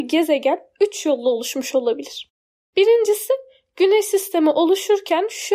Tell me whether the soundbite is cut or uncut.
uncut